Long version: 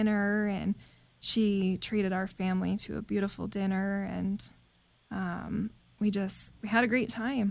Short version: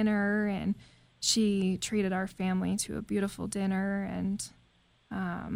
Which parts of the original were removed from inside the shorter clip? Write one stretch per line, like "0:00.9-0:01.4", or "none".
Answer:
none

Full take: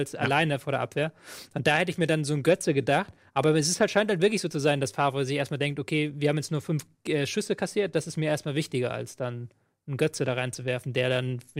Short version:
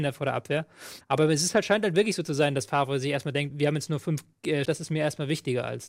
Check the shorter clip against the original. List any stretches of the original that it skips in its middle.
0:01.5-0:03.3
0:05.8-0:06.1
0:07.3-0:07.9

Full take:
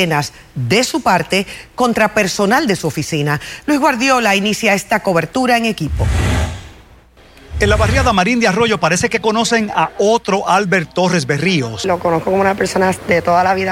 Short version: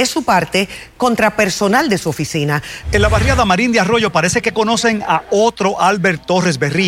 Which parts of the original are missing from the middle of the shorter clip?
0:03.6-0:07.5

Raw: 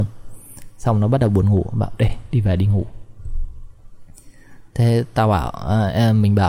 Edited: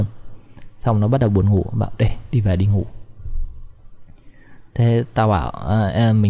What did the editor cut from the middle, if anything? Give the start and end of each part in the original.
none

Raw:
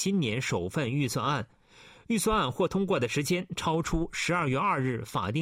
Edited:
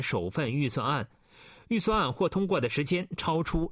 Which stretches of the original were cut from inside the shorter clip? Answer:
none

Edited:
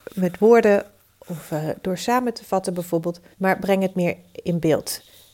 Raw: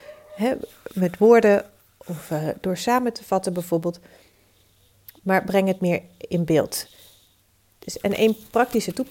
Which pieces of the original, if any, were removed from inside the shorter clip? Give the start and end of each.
0:04.1-0:05.2

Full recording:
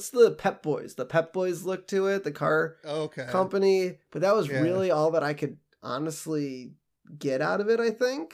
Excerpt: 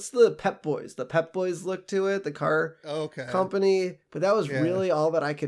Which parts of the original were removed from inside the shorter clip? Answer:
none

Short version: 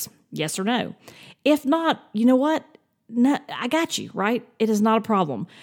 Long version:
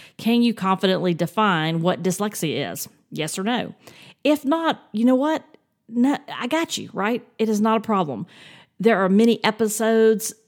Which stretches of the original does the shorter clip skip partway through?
none

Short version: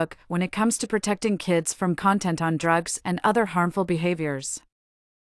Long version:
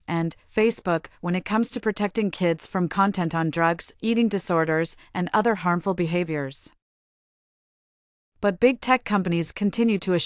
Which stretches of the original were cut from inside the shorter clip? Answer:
0:04.0-0:05.1

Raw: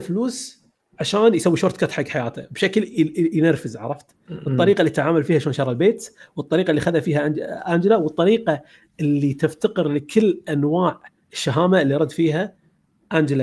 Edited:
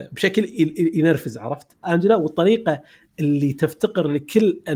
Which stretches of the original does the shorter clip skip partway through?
0:04.2-0:07.6

